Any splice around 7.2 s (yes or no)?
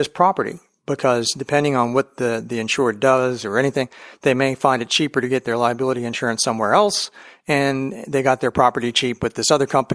no